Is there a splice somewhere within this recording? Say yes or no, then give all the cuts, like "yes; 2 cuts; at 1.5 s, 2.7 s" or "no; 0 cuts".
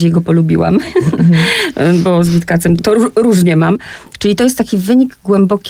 yes; 1 cut; at 2.8 s